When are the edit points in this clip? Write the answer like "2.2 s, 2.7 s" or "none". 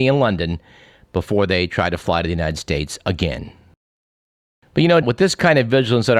5.0 s